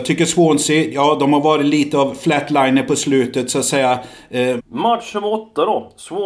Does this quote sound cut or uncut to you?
cut